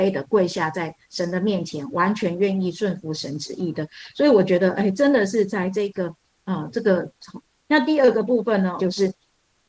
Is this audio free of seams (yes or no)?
no